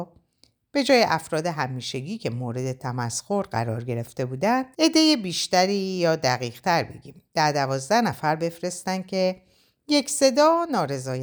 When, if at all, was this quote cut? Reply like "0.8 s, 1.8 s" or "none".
4.7 s